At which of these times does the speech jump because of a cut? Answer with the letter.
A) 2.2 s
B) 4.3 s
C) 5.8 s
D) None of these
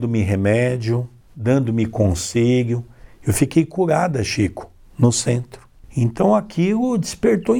D